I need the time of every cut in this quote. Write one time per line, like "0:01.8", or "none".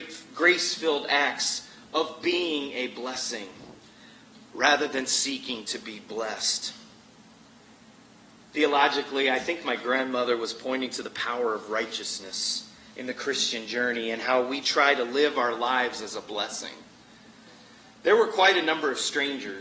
none

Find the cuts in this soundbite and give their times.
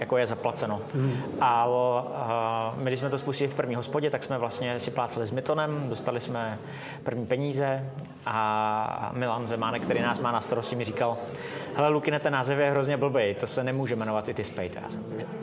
none

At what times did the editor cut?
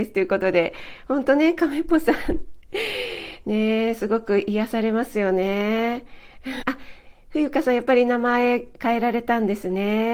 0:06.6

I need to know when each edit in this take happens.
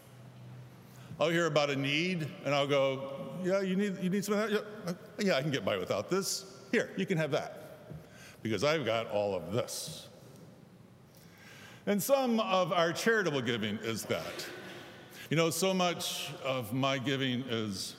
0:14.0
0:15.3

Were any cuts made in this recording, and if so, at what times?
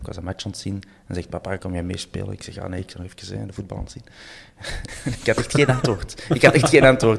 0:01.6
0:04.9

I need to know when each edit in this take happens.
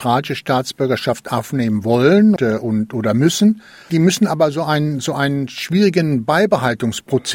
0:02.4

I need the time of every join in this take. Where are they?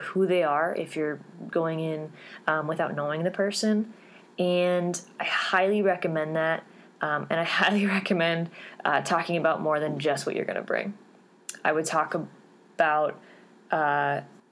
none

